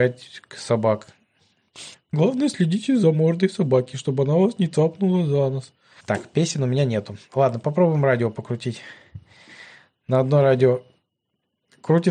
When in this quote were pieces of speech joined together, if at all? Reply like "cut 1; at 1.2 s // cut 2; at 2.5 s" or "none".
cut 1; at 1.9 s // cut 2; at 6.0 s